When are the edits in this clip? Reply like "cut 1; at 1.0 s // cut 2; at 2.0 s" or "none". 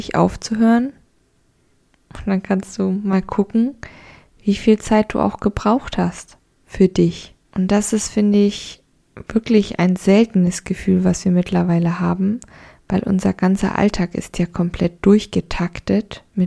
cut 1; at 7.4 s